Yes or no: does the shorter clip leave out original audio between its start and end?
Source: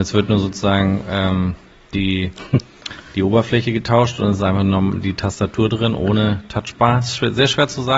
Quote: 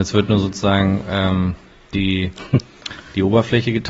no